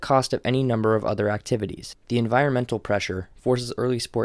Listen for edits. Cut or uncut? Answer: uncut